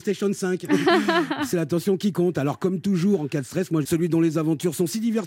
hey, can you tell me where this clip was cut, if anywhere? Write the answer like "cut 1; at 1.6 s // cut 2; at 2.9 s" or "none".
cut 1; at 3.8 s